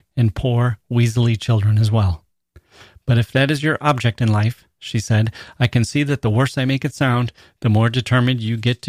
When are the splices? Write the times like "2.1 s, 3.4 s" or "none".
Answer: none